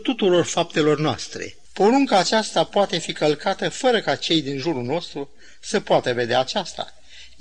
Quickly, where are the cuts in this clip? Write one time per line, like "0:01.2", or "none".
0:01.7